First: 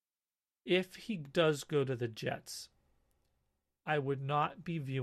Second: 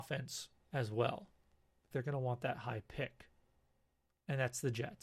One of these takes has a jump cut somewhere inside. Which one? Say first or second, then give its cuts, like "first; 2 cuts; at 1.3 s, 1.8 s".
second; 1 cut; at 1.9 s